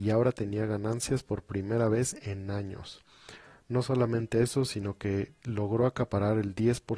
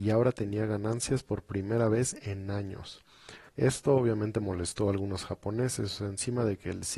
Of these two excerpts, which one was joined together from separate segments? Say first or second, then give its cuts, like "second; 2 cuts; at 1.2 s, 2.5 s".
second; 1 cut; at 3.5 s